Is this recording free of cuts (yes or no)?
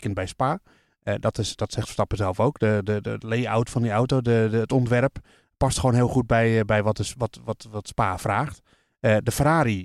yes